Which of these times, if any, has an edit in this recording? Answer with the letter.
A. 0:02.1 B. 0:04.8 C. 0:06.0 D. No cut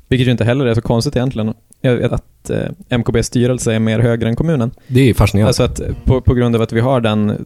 A